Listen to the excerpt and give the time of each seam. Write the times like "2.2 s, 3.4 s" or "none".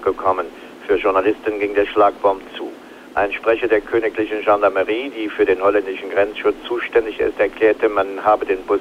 none

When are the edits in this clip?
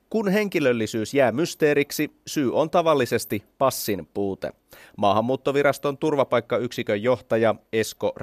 none

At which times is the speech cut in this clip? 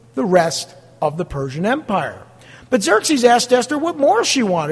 none

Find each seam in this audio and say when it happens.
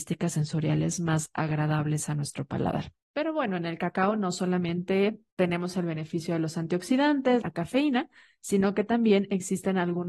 3.0 s, 5.3 s, 7.4 s

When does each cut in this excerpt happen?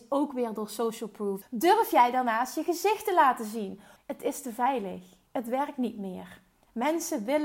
1.4 s, 4.0 s

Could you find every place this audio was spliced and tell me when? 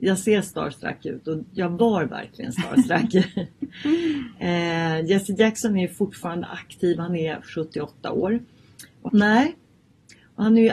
9.1 s

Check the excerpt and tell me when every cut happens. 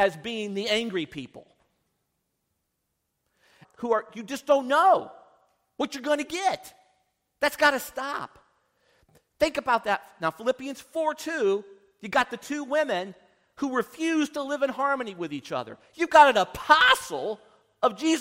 3.6 s

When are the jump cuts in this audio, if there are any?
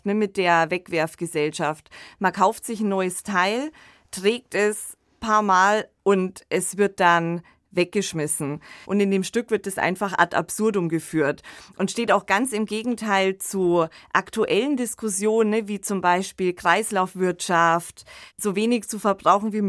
8.8 s

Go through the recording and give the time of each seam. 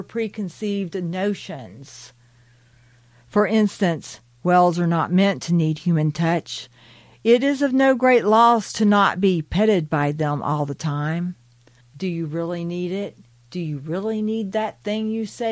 11.8 s, 13.3 s

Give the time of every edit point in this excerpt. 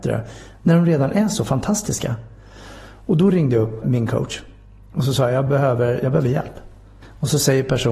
3.8 s, 5.5 s

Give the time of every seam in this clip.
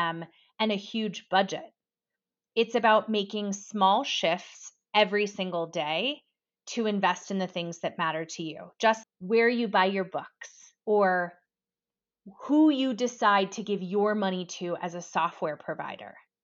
9.0 s, 10.8 s

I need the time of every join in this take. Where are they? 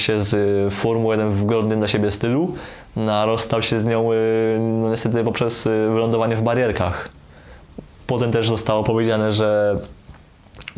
7.9 s

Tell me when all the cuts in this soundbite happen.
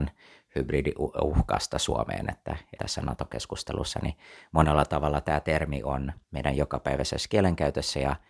2.8 s, 6.2 s

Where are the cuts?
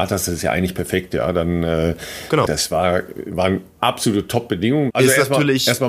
2.4 s, 4.9 s

